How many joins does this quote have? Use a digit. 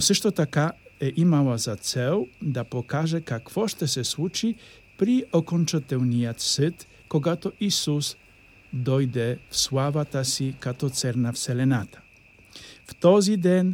1